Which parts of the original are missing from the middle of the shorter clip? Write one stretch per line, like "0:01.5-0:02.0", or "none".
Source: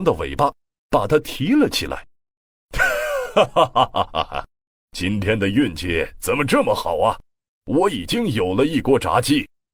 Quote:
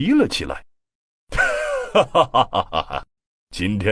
none